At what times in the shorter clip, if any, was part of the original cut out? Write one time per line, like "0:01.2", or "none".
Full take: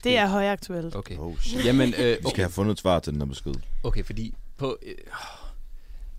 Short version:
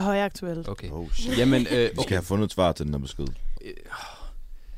0:03.6

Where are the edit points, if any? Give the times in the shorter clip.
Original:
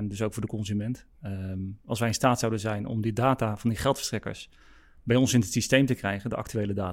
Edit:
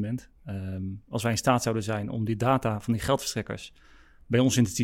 none

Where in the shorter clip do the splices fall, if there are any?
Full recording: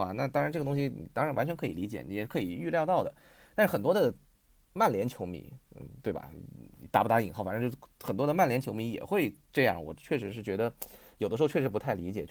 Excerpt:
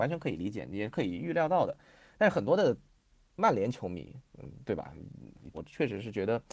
0:05.5

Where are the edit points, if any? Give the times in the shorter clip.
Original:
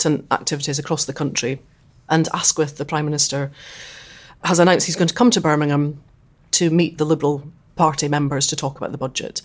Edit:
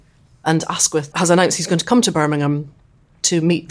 0:01.1

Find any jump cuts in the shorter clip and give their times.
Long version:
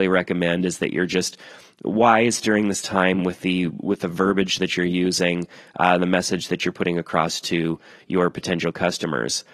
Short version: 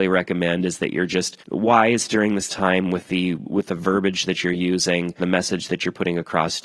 0:01.4
0:05.2

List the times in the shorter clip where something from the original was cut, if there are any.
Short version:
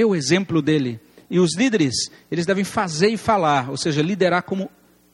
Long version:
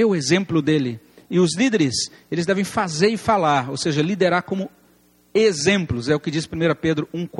none

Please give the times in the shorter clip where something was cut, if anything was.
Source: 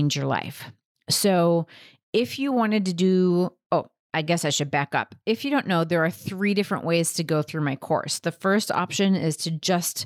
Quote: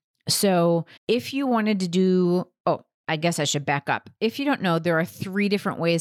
0:01.0

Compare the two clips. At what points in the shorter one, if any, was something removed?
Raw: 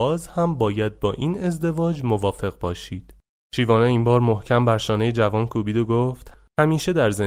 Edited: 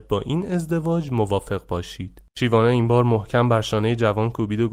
0:02.3

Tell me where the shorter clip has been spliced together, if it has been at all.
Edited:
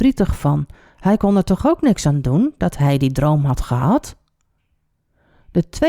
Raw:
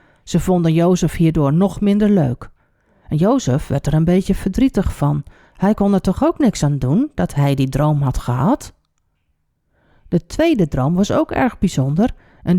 none

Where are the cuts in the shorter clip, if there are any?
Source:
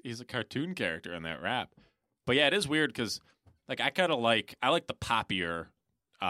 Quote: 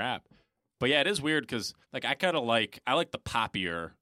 0:01.8

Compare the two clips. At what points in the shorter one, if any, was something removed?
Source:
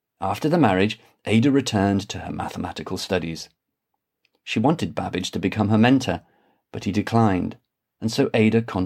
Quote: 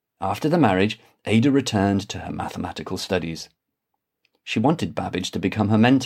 none

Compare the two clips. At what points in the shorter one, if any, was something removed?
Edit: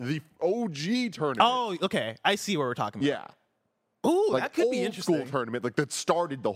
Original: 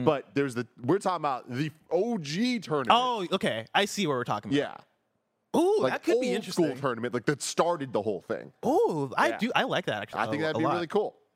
none

